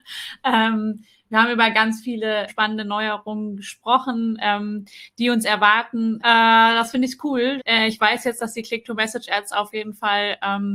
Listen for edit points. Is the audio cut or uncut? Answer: cut